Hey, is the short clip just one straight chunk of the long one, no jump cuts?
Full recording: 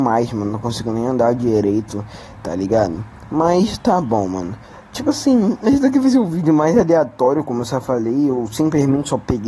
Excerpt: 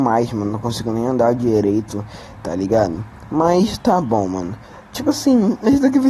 yes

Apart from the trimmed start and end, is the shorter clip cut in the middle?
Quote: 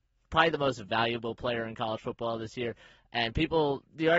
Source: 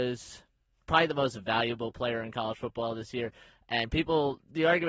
no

